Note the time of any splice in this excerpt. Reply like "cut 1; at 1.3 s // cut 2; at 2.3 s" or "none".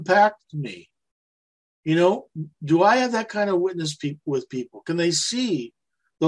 none